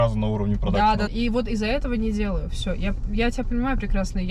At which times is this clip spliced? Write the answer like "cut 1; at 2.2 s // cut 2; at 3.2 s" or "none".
cut 1; at 1.1 s

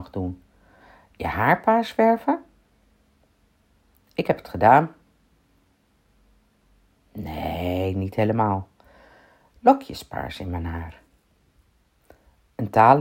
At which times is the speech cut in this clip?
none

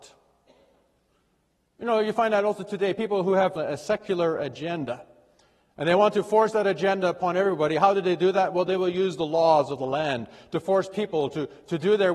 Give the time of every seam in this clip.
cut 1; at 3.6 s

